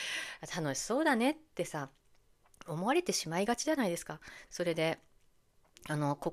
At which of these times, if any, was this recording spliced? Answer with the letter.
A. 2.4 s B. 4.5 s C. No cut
B